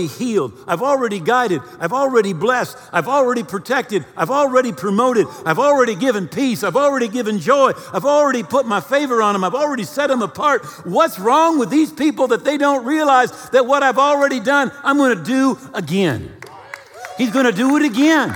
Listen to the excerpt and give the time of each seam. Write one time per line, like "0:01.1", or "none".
none